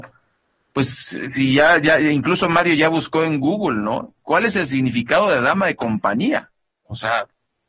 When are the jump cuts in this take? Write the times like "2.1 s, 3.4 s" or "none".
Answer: none